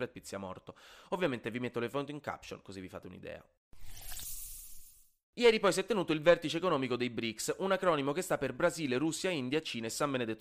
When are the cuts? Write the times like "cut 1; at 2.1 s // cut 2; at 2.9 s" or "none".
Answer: none

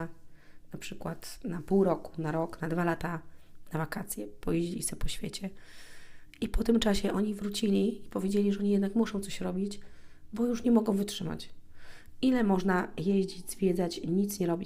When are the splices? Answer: none

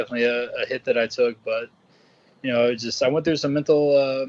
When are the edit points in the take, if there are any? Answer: none

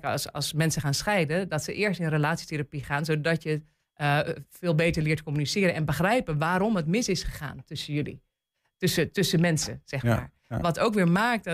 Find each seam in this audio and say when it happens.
none

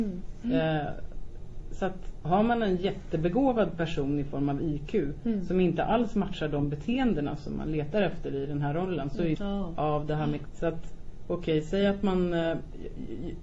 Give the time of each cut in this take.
cut 1; at 9.4 s // cut 2; at 10.5 s

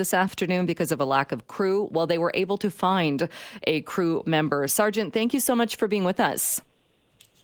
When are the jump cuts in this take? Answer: cut 1; at 4.7 s

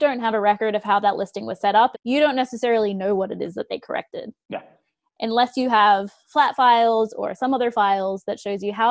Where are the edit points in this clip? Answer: cut 1; at 1.9 s

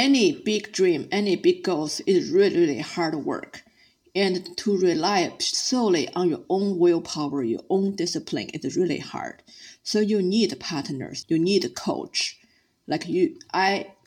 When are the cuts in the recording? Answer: cut 1; at 11.2 s

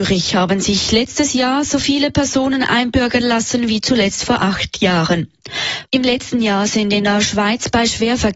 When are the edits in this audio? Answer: cut 1; at 5.9 s

